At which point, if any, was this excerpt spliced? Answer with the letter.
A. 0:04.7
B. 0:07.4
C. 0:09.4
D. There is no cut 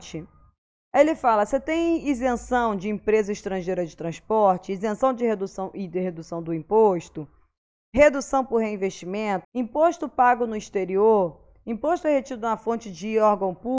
C